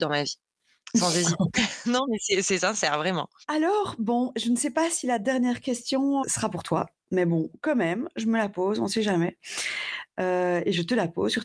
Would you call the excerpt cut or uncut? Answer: cut